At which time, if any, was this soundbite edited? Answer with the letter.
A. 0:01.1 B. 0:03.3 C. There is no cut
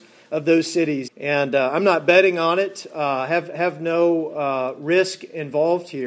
A